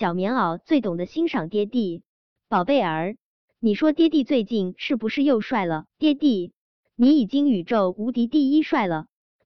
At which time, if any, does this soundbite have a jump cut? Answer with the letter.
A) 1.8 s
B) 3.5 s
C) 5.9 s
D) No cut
C